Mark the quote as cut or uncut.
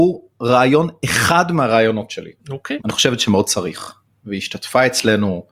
cut